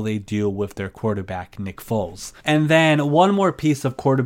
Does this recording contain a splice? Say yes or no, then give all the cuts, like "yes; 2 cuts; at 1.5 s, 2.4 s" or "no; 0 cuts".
yes; 1 cut; at 2.4 s